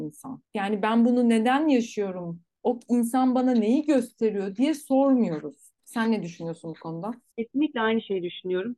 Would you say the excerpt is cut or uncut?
uncut